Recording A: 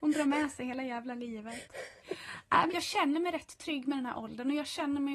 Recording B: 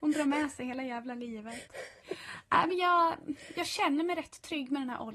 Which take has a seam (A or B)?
A